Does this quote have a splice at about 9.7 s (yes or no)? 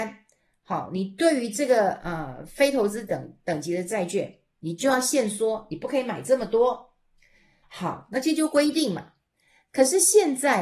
no